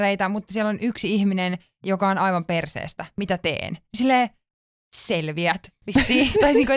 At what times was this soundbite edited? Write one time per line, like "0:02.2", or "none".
none